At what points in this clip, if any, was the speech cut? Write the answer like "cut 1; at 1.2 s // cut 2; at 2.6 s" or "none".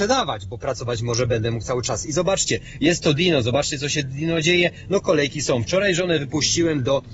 none